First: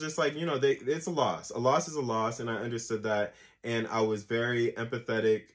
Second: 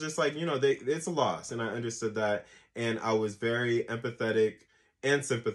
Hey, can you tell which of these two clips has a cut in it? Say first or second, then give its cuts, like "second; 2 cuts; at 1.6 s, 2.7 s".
second; 1 cut; at 1.5 s